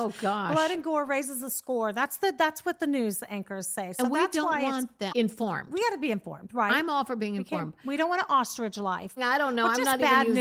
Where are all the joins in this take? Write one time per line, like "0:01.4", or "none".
0:05.1
0:09.2